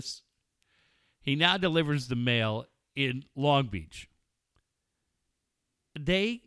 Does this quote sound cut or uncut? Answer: uncut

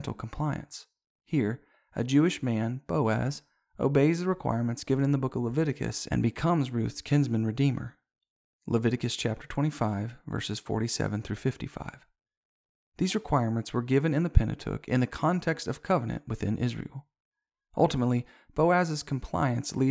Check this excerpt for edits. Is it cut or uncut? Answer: cut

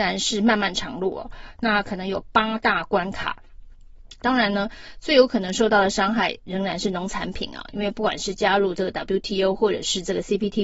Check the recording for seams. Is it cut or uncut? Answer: cut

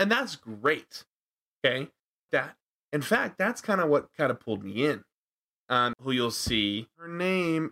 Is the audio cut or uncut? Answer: cut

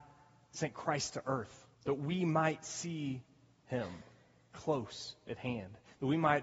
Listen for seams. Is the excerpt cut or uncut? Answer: cut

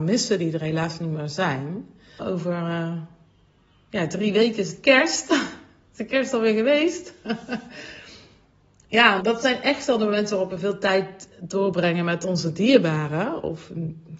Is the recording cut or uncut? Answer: cut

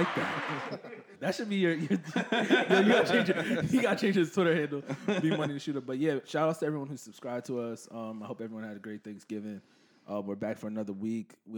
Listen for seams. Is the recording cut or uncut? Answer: cut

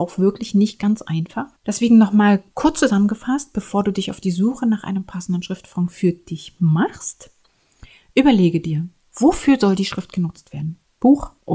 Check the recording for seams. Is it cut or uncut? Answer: cut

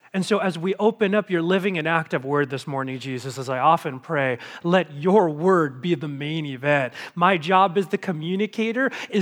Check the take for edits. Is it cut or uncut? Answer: uncut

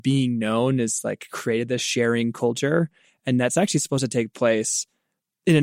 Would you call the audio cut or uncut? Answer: uncut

